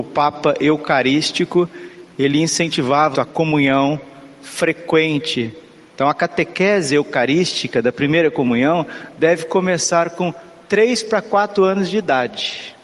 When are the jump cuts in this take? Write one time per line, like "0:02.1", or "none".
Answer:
0:03.1
0:05.9